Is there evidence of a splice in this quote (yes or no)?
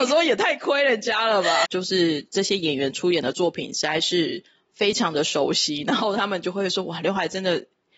yes